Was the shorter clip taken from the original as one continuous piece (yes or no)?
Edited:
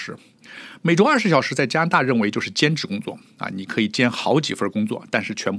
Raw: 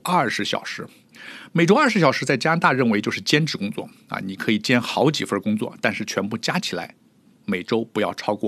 yes